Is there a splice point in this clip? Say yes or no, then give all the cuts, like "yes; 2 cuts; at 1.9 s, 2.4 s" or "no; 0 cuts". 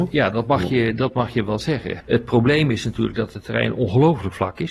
yes; 1 cut; at 2.0 s